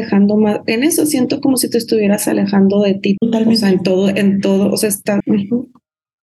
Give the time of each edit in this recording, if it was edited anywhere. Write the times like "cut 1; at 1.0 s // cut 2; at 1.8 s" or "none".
cut 1; at 3.2 s // cut 2; at 5.2 s